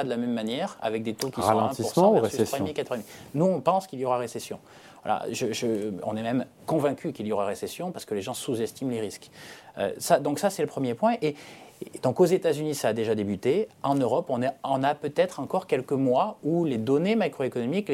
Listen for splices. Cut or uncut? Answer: uncut